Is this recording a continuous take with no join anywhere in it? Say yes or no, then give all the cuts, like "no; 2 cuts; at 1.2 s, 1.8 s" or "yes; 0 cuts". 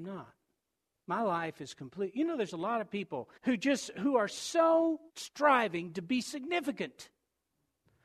no; 2 cuts; at 3.4 s, 5.1 s